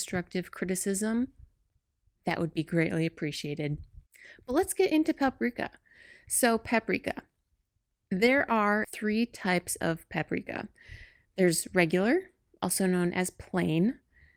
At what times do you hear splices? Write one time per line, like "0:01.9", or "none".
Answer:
0:08.8